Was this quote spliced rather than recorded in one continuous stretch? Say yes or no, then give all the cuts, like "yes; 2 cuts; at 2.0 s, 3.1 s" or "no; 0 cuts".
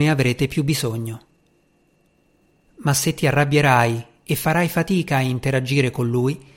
yes; 1 cut; at 2.7 s